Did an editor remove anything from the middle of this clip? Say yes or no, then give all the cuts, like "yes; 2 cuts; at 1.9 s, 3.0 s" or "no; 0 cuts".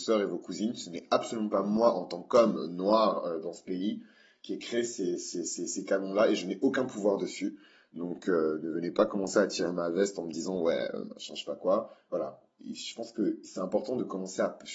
no; 0 cuts